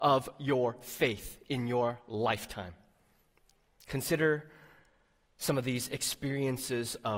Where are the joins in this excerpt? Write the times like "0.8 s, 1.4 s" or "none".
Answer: none